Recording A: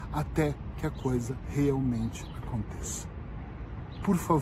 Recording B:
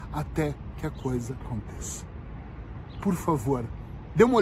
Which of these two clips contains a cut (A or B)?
B